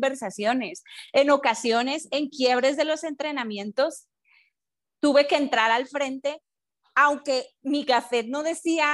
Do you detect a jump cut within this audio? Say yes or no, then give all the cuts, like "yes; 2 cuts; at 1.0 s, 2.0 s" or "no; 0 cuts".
no; 0 cuts